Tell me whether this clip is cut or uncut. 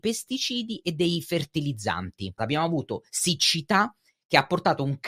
cut